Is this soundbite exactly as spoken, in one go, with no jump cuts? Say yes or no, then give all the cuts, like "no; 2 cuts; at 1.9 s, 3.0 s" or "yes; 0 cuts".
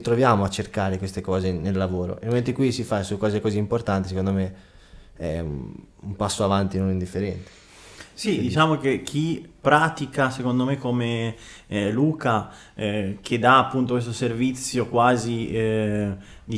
yes; 0 cuts